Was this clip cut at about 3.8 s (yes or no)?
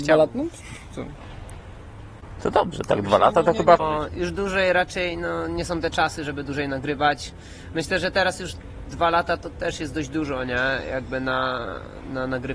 yes